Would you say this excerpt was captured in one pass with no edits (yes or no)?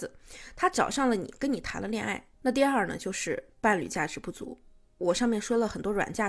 no